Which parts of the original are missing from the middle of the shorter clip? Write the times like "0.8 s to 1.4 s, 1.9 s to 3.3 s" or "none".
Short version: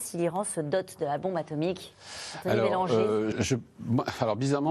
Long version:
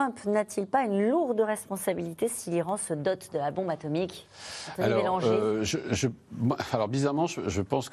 5.7 s to 5.8 s